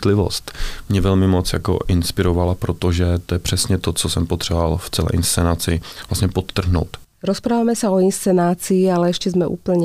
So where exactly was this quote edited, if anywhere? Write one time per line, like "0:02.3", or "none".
0:07.0